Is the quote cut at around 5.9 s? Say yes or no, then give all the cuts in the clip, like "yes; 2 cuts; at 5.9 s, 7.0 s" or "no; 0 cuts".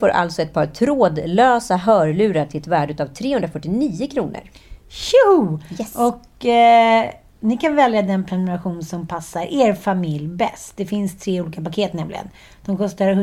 no; 0 cuts